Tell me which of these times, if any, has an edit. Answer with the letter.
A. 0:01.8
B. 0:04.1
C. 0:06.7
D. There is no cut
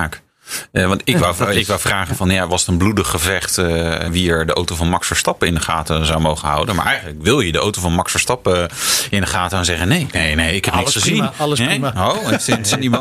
B